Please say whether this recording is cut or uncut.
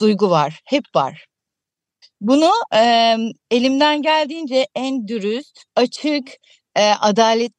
cut